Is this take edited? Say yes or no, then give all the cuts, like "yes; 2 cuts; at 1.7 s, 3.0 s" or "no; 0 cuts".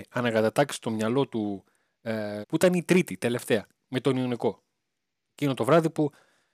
yes; 1 cut; at 2.4 s